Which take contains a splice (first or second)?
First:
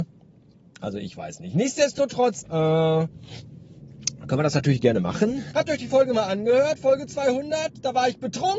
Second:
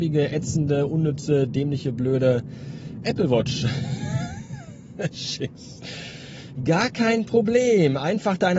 first